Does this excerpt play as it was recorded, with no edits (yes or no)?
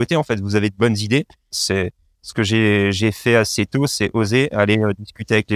no